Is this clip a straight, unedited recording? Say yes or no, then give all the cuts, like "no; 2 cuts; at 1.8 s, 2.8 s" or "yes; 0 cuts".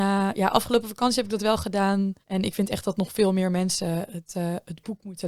no; 1 cut; at 2.2 s